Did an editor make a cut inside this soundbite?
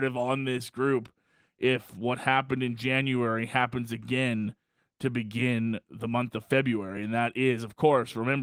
no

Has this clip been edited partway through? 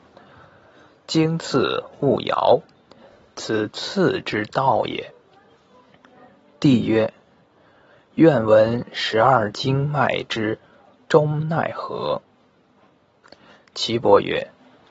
no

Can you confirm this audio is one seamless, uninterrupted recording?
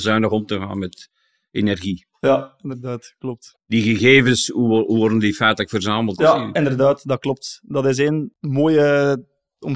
no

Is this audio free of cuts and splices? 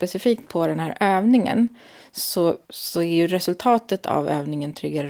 no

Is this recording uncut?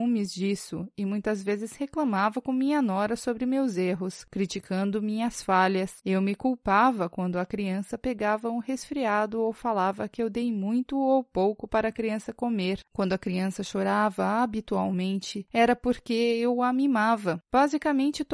yes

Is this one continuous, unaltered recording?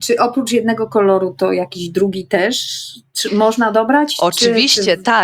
yes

